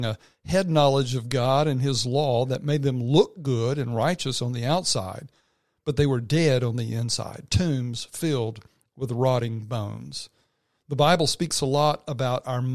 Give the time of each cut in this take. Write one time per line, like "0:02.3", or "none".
none